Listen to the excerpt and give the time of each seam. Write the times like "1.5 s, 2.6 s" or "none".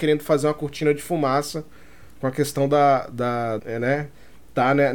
3.6 s